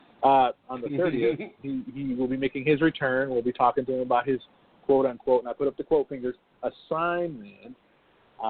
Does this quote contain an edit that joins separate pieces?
no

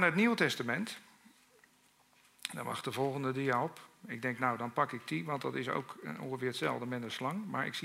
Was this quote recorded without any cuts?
yes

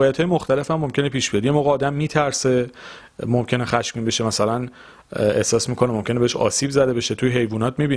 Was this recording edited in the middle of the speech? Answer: no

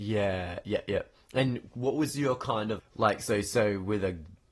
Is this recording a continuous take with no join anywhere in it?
no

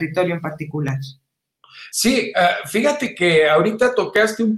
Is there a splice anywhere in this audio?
no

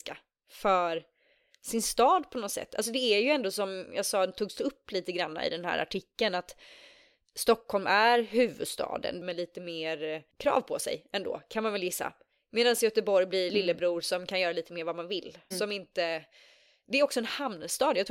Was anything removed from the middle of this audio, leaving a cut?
yes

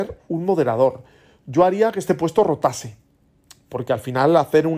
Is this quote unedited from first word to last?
yes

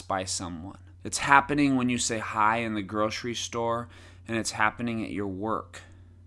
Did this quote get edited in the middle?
yes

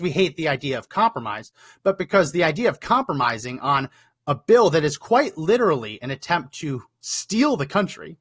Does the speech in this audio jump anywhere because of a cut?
no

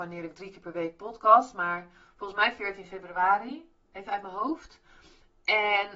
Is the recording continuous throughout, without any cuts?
yes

